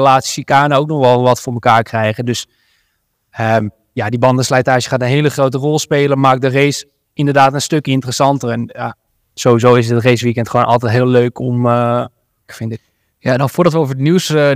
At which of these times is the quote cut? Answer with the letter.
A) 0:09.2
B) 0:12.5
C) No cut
B